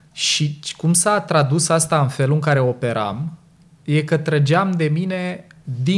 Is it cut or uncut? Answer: uncut